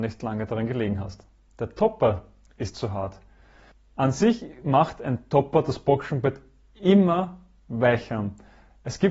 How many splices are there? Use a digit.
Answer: 1